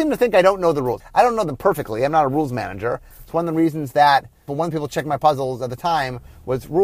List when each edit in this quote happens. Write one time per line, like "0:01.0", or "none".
0:01.0
0:03.1
0:04.5